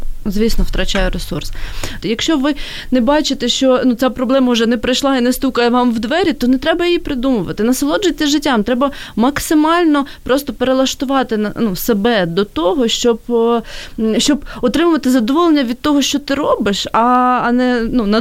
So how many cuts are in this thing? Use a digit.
1